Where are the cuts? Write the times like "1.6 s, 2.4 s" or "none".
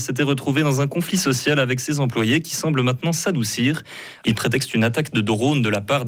4.2 s